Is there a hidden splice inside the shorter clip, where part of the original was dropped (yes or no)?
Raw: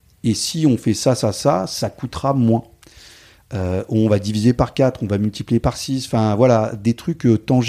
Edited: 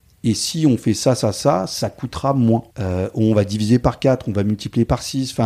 yes